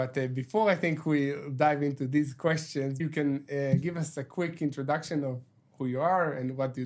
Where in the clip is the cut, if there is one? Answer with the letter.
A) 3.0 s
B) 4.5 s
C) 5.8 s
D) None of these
A